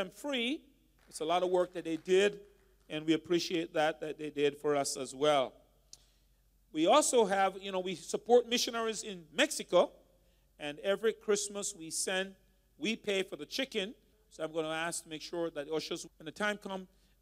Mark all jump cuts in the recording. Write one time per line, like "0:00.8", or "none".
0:01.0
0:14.1
0:16.1